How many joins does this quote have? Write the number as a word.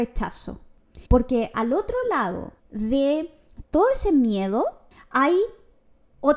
two